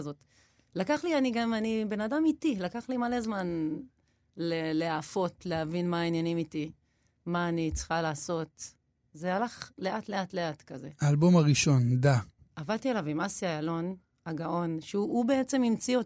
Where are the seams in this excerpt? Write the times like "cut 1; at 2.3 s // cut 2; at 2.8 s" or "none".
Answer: cut 1; at 12.4 s